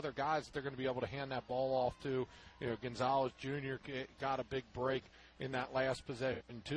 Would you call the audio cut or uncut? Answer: uncut